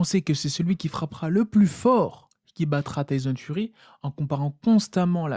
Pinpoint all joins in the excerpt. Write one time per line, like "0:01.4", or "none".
none